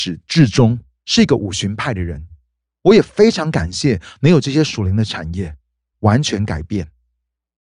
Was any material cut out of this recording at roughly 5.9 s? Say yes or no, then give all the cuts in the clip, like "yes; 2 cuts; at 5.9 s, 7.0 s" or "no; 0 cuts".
yes; 1 cut; at 5.9 s